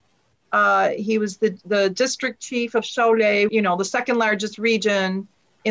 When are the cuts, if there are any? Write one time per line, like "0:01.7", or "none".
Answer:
0:03.5